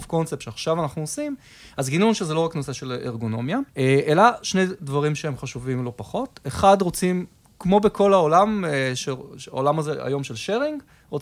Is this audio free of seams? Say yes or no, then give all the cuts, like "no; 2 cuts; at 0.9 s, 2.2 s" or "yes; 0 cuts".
no; 1 cut; at 3.7 s